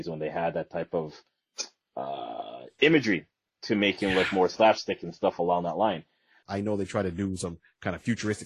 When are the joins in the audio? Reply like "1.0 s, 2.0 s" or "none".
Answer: 6.4 s